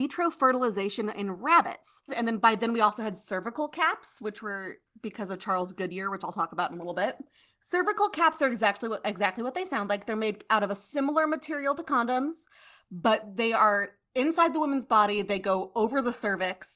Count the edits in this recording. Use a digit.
1